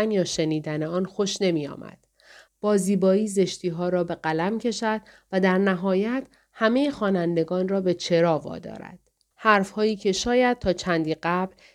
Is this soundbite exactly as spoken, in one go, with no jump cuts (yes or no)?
no